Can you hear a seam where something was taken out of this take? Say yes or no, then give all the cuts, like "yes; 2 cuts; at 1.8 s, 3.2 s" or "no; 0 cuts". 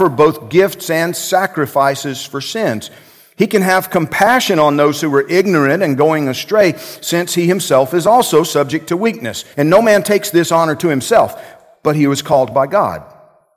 yes; 1 cut; at 9.5 s